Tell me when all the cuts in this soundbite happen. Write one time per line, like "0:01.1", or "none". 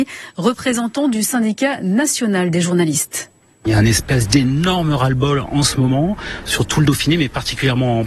none